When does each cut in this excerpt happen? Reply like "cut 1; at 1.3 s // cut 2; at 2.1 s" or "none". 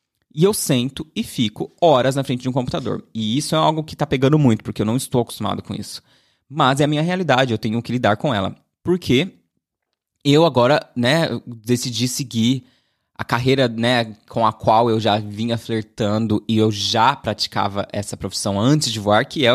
none